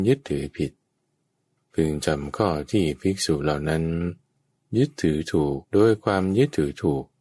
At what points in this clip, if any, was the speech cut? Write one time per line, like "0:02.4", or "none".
0:05.6